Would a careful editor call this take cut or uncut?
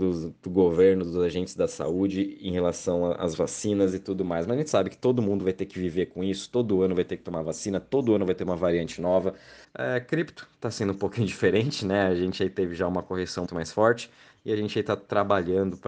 cut